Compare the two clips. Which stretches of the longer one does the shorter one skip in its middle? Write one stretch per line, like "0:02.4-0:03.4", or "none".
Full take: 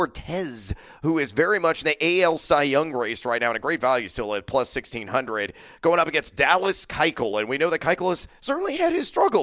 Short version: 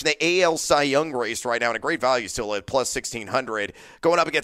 none